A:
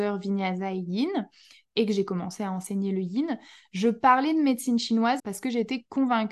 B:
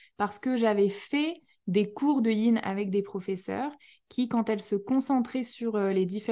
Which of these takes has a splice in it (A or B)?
A